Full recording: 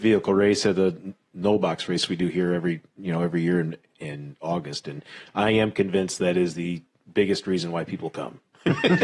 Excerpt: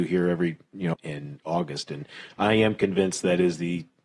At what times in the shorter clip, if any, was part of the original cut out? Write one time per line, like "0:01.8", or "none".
0:00.9